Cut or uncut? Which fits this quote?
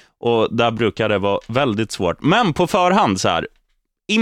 uncut